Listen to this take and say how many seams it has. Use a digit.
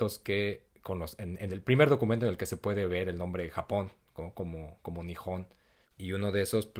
1